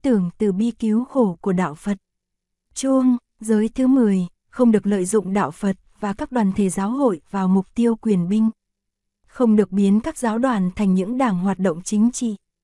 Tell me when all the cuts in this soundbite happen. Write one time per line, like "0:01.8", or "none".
0:02.7